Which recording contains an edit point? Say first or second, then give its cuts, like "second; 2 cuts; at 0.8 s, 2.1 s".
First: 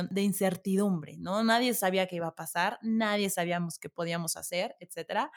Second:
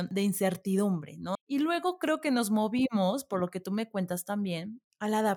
second; 1 cut; at 1.4 s